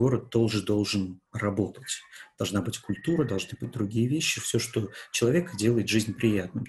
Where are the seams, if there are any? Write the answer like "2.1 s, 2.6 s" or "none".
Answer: 1.3 s